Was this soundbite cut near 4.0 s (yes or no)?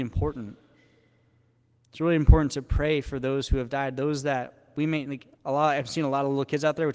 no